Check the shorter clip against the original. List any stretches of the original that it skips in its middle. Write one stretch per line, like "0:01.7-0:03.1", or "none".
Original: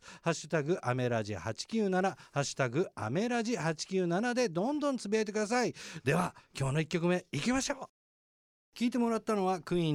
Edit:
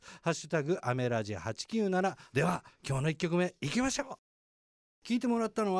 0:02.3-0:06.0